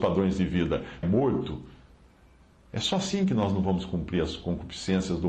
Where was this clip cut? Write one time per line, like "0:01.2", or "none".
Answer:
0:01.0